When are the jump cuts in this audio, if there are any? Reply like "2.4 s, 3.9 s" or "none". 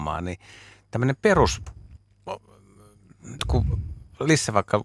3.4 s

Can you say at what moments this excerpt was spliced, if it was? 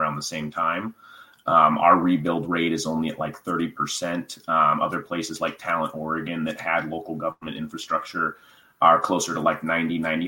none

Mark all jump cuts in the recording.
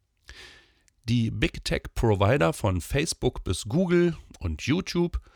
0.9 s

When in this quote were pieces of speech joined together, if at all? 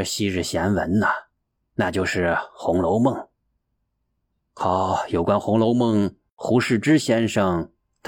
1.6 s

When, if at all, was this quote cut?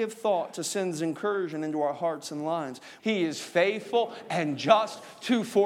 3.0 s

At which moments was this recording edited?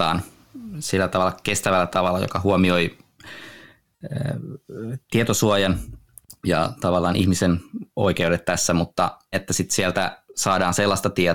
9.3 s

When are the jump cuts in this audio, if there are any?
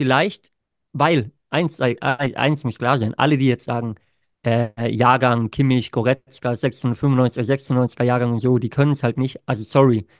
none

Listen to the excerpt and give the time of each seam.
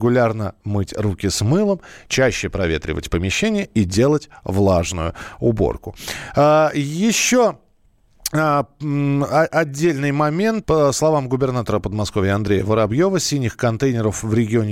10.6 s

